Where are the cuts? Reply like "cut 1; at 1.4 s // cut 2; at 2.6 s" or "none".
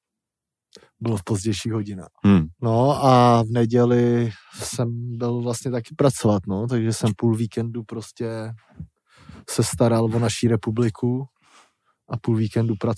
cut 1; at 2.5 s